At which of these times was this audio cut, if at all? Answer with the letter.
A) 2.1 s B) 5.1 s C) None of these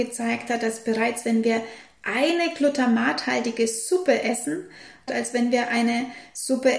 B